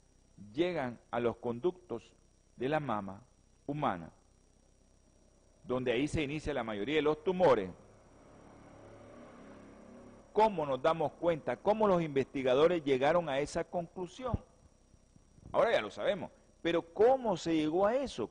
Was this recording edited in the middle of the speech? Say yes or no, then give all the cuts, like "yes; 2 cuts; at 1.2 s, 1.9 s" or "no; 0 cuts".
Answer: yes; 1 cut; at 10.2 s